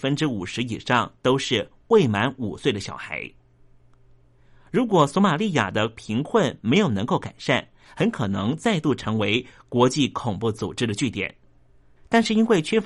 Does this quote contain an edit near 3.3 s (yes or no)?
no